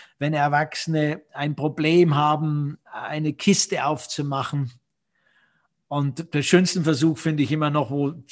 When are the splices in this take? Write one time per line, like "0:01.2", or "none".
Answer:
none